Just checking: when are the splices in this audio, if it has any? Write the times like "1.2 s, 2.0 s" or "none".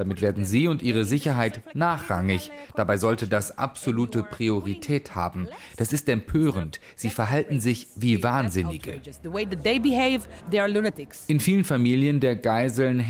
none